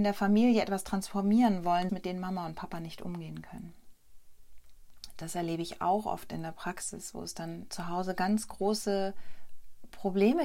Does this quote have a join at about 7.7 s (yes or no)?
yes